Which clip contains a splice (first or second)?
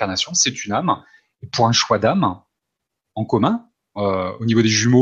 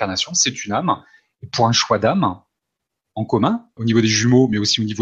second